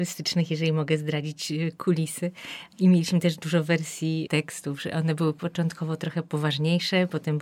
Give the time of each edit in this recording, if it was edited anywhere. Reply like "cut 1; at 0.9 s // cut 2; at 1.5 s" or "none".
none